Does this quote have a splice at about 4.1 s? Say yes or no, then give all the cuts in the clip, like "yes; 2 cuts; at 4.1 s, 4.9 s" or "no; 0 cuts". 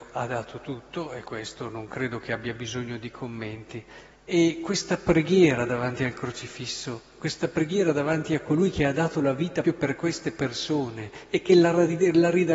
yes; 2 cuts; at 4.1 s, 9.6 s